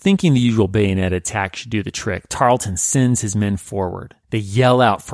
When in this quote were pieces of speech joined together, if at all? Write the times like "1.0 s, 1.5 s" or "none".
4.2 s